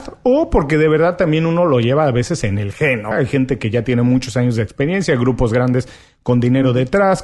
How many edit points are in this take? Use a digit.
1